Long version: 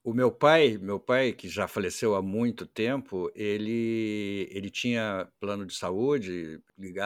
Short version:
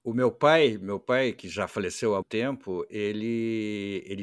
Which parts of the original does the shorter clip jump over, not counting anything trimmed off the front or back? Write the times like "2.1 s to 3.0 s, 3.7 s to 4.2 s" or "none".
2.2 s to 2.7 s